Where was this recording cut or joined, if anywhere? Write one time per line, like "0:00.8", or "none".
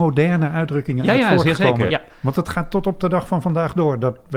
0:01.9

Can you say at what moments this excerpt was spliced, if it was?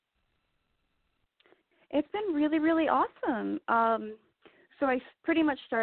none

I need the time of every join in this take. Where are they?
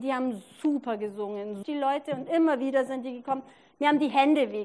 0:01.6

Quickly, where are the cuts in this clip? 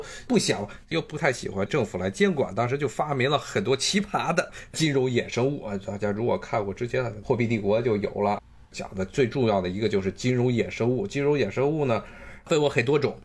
none

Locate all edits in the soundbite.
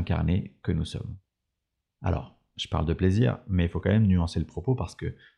none

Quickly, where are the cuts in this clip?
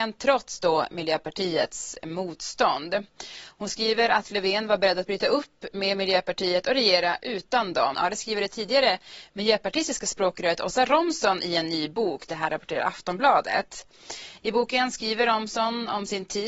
0:07.9

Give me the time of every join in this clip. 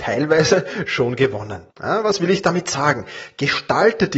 0:01.7

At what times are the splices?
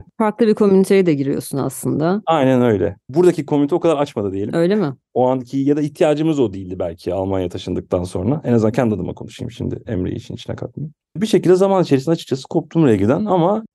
none

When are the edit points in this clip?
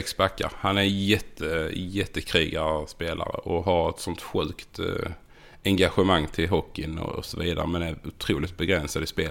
none

